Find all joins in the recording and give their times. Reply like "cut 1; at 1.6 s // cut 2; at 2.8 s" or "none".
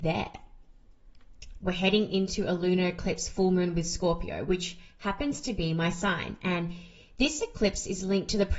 cut 1; at 1.6 s

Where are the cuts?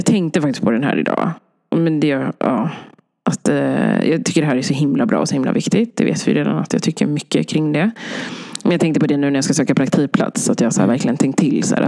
none

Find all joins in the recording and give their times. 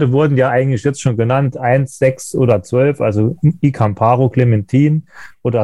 none

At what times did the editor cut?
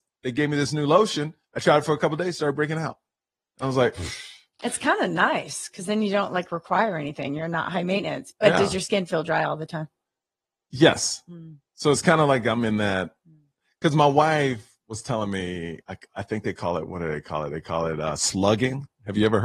cut 1; at 15.8 s

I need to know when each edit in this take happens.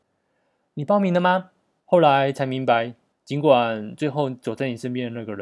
cut 1; at 1.8 s // cut 2; at 3.1 s

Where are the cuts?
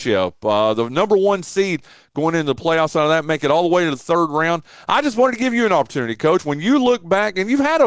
none

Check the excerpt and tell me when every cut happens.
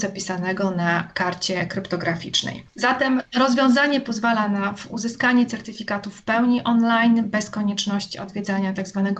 cut 1; at 2.7 s

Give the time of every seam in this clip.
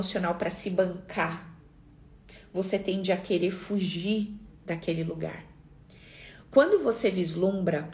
none

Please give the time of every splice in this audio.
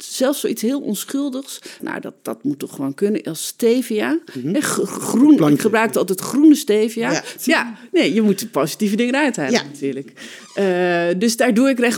cut 1; at 1.8 s // cut 2; at 7.4 s

